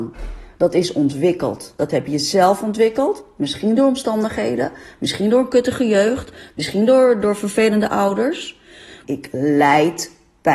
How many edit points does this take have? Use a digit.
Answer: 2